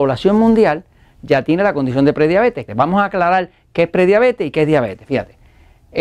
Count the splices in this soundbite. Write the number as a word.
one